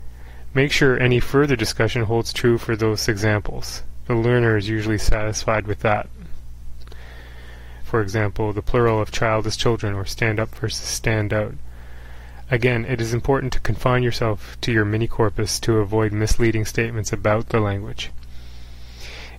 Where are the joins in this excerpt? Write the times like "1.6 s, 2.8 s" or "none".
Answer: 7.8 s